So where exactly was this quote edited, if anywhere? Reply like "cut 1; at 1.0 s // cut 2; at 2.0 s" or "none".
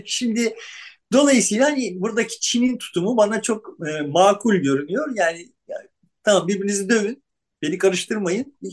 none